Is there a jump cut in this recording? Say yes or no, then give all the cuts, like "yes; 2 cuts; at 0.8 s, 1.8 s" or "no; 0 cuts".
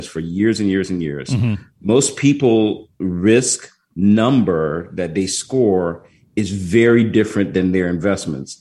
no; 0 cuts